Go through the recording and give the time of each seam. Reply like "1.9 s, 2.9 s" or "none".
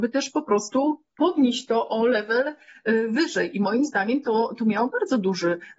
1.1 s